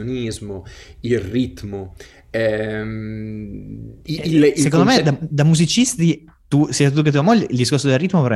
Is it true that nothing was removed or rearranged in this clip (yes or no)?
no